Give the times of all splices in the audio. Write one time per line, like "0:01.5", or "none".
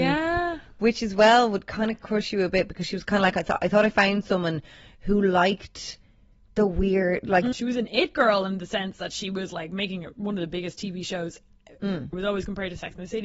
0:07.5
0:12.1